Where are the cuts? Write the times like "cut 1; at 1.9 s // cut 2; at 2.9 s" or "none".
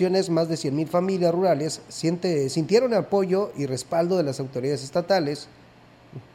none

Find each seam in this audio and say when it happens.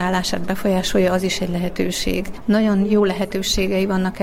cut 1; at 2.4 s

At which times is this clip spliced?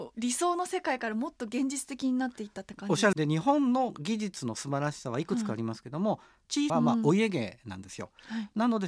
cut 1; at 3.1 s // cut 2; at 6.7 s

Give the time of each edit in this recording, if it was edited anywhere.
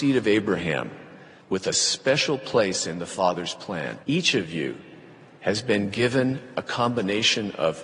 cut 1; at 1.4 s // cut 2; at 4.0 s

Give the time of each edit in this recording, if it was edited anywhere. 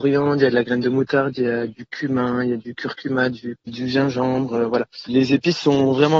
cut 1; at 3.7 s // cut 2; at 5.1 s

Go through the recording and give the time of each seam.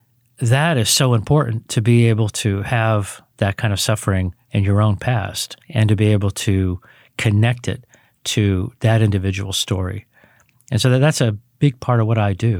cut 1; at 5.6 s

